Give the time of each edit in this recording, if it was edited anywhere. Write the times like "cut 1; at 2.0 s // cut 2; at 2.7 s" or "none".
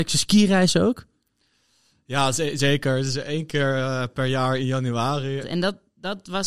cut 1; at 5.4 s